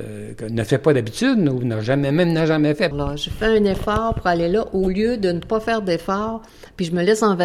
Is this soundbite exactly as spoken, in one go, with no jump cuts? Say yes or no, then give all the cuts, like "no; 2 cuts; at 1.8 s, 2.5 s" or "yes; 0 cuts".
no; 1 cut; at 2.9 s